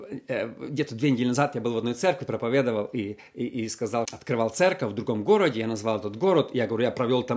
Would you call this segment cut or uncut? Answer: cut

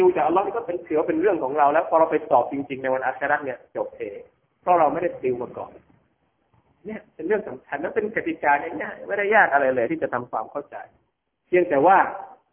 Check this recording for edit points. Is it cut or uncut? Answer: uncut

